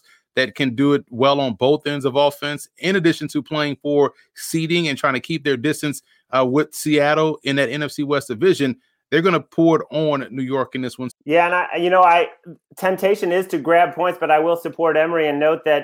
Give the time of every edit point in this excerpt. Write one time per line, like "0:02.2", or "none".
0:11.1